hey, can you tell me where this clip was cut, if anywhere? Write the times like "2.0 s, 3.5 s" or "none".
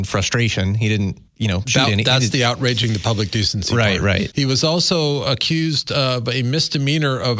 1.3 s, 4.3 s